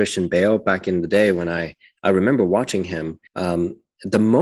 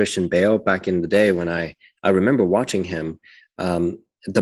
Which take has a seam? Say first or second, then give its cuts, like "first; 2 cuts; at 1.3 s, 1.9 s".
first; 1 cut; at 3.3 s